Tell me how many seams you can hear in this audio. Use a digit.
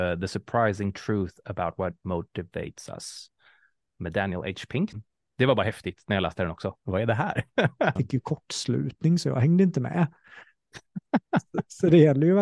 3